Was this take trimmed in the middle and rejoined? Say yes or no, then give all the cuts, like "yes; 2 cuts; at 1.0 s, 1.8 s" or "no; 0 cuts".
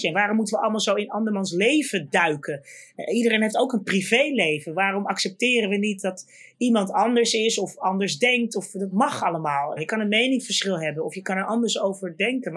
yes; 1 cut; at 9.8 s